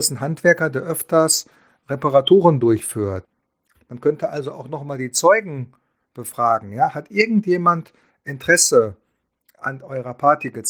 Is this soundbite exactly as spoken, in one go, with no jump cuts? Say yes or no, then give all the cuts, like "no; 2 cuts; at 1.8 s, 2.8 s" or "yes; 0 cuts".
no; 1 cut; at 3.7 s